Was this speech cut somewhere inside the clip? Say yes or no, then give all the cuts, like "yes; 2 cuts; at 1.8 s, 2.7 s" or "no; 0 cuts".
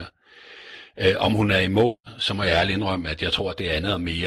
no; 0 cuts